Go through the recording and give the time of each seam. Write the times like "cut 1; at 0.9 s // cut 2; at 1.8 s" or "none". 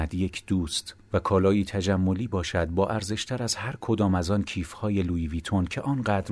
none